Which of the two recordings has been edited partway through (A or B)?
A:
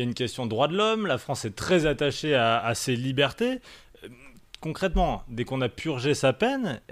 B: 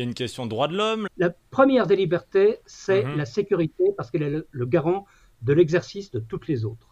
B